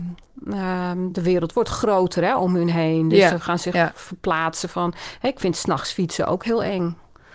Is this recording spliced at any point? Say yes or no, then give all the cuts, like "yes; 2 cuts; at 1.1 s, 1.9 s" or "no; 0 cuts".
no; 0 cuts